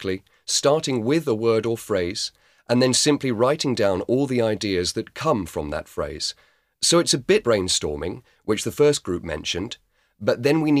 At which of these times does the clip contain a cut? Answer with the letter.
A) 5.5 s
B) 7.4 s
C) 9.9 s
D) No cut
B